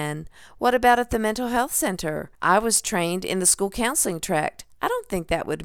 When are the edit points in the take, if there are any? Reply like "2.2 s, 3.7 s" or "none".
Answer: 2.3 s